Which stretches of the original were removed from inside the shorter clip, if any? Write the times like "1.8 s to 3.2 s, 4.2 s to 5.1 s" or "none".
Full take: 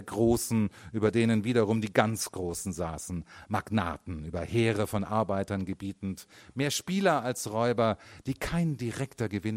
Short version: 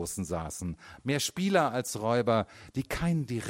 3.4 s to 6.5 s